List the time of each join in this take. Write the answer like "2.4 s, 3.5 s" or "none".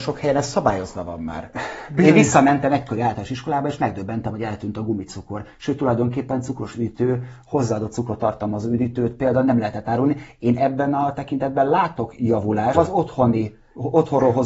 12.7 s